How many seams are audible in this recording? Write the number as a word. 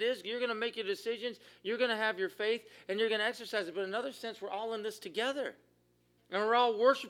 one